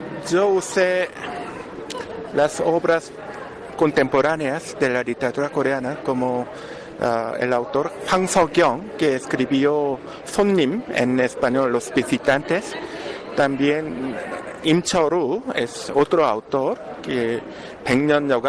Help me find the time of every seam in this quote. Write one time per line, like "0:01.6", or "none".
none